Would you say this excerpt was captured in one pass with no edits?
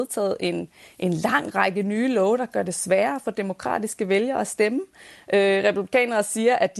yes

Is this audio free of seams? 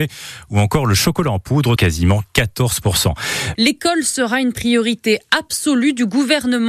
no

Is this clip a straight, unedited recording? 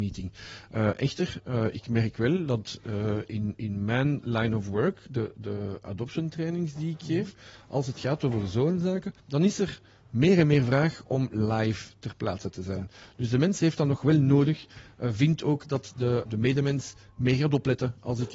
no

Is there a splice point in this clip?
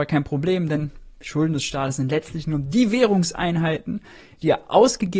no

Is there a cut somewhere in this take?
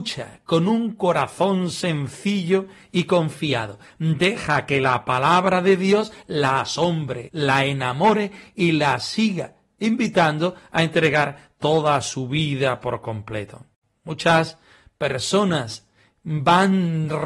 yes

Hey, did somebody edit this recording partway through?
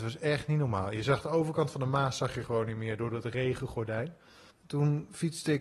yes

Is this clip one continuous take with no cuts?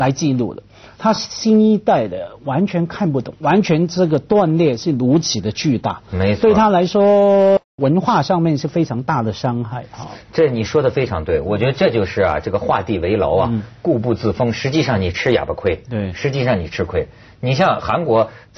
yes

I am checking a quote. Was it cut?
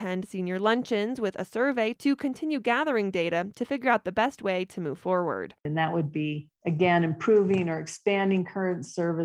no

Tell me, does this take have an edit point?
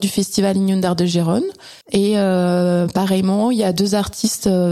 yes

